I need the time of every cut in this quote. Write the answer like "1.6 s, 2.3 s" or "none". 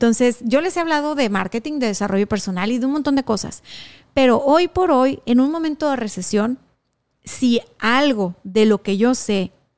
none